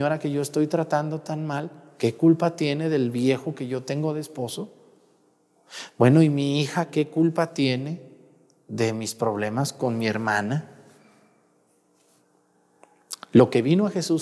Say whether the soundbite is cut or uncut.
uncut